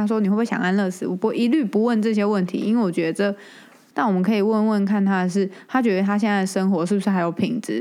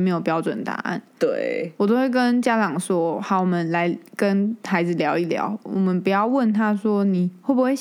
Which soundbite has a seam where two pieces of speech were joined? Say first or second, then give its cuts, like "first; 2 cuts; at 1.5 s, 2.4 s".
first; 1 cut; at 3.9 s